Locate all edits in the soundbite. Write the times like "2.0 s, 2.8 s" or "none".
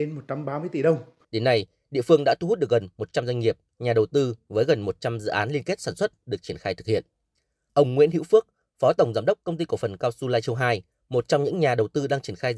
1.2 s